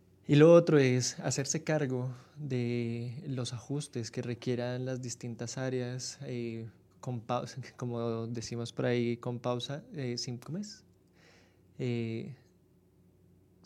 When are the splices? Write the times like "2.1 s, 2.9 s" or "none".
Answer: 6.9 s